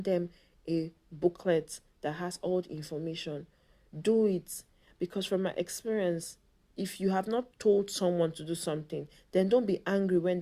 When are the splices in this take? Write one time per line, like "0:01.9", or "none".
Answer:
none